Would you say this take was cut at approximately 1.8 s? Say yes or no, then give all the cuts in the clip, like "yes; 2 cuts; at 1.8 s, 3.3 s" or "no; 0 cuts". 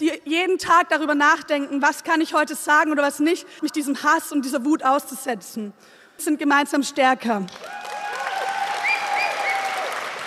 no; 2 cuts; at 3.6 s, 6.2 s